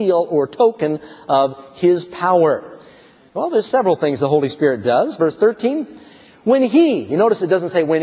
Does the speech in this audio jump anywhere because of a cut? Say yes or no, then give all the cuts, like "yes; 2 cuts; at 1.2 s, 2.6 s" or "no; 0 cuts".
yes; 2 cuts; at 3.3 s, 5.2 s